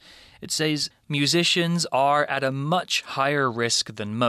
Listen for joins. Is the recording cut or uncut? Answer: cut